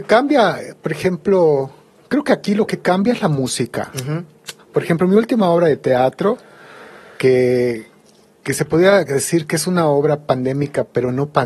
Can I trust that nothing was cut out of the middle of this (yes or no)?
no